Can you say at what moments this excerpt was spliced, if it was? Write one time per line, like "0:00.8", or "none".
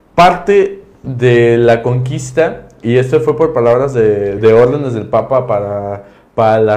0:04.4